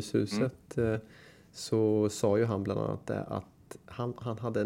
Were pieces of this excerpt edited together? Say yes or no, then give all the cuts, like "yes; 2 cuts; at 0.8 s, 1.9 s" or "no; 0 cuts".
no; 0 cuts